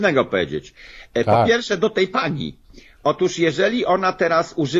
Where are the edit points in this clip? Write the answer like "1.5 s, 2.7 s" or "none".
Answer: none